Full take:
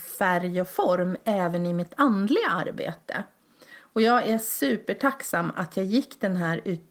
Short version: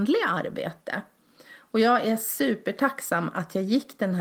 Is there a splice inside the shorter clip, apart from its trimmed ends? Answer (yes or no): no